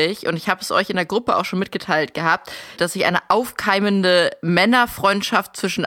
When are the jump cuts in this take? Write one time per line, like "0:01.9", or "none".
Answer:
0:02.8